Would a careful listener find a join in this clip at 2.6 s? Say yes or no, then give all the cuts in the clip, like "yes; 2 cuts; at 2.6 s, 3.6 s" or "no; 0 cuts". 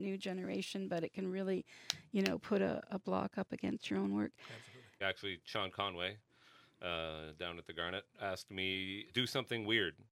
no; 2 cuts; at 5.0 s, 9.1 s